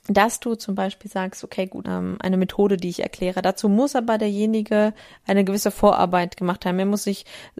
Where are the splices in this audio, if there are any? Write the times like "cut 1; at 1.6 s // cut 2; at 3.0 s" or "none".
cut 1; at 1.8 s